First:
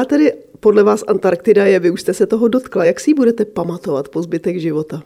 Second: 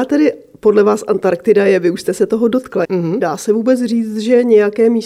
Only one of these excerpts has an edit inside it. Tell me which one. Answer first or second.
second